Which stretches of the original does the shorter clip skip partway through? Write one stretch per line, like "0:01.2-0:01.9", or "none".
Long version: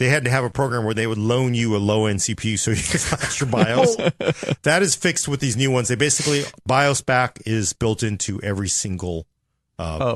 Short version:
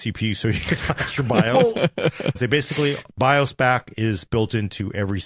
0:04.6-0:05.8

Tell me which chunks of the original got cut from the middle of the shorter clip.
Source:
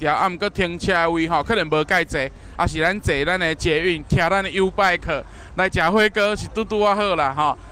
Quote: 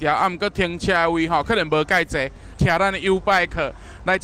0:02.5-0:04.0

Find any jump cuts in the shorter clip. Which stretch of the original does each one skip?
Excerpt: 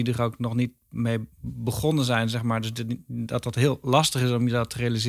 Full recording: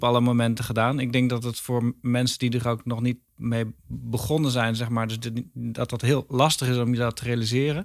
none

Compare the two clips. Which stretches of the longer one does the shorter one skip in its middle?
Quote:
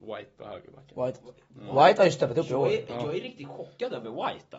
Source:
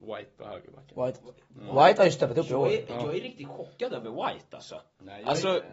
none

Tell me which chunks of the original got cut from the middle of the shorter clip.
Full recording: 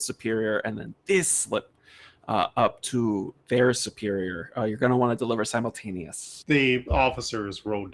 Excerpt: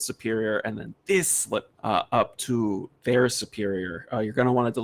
0:01.7-0:02.2

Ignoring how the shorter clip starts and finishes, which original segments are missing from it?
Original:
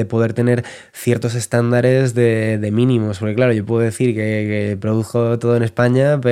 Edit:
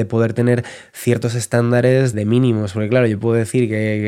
0:02.1-0:02.6

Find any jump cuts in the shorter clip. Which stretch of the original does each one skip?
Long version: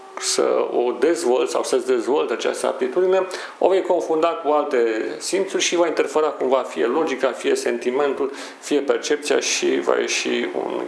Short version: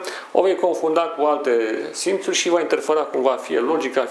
none

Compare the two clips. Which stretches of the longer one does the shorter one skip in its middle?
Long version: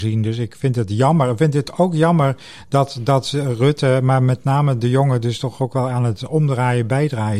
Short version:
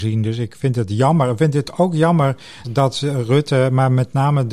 0:02.6-0:02.9

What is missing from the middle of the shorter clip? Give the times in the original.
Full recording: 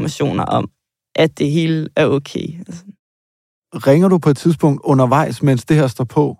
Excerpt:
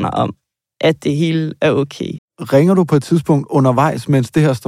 0:02.5-0:03.5

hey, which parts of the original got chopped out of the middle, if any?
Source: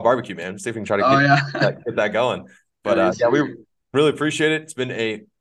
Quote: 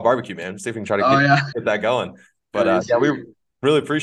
0:01.5-0:01.8

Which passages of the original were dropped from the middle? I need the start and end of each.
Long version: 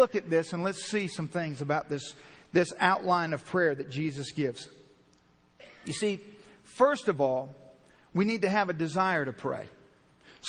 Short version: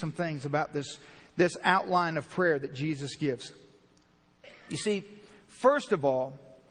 none

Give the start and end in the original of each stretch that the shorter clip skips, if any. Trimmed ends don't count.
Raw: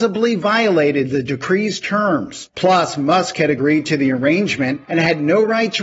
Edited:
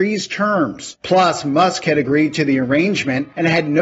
none

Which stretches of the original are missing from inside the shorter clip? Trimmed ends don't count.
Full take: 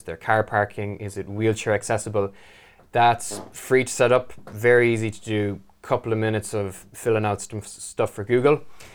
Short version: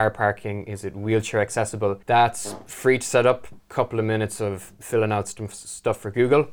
0:02.4-0:02.9
0:04.4-0:05.7

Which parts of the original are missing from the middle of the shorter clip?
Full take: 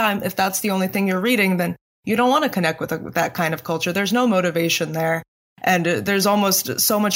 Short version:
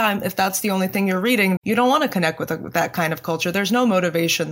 0:01.6-0:02.0

